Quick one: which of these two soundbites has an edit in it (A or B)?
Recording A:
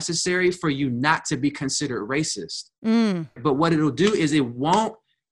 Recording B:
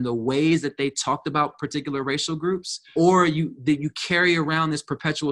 A